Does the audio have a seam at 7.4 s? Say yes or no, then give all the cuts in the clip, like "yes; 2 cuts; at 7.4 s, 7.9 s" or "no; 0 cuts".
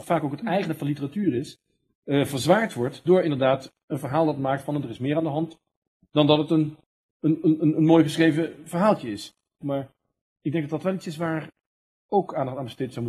no; 1 cut; at 9.6 s